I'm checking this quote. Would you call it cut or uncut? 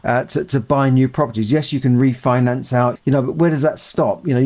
cut